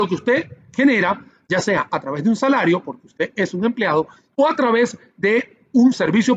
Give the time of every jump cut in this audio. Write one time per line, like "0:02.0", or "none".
none